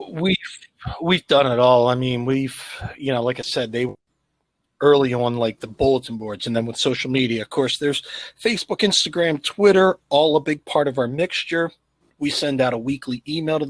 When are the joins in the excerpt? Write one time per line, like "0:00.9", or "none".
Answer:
none